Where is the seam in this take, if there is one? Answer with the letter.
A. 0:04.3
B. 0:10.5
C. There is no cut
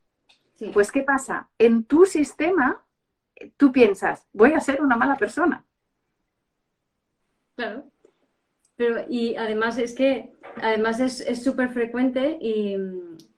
A